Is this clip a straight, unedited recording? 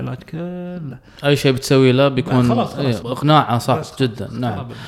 no; 1 cut; at 3.0 s

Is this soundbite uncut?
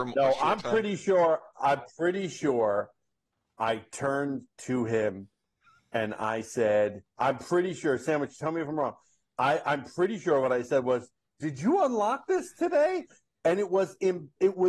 yes; 0 cuts

